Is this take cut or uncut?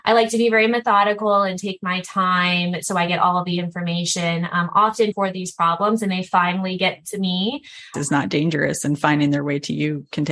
cut